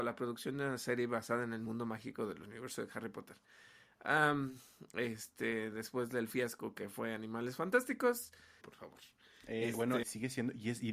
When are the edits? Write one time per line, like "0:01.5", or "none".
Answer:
0:08.6
0:10.0

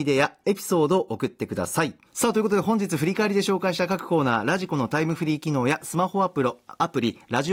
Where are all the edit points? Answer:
0:02.1

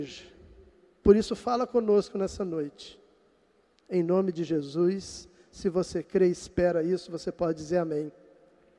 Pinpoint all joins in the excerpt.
none

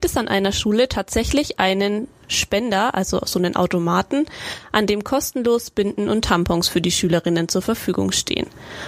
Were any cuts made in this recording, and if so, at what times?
none

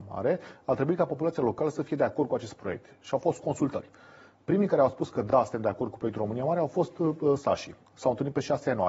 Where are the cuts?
none

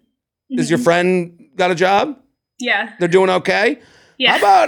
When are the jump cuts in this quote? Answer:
none

